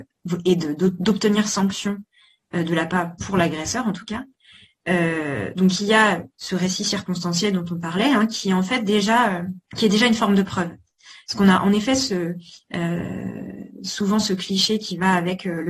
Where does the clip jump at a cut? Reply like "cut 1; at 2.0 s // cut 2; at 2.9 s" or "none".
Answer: cut 1; at 9.7 s